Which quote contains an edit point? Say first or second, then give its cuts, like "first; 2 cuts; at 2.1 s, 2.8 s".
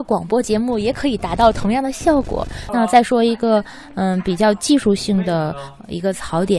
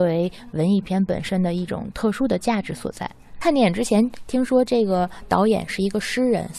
first; 1 cut; at 2.7 s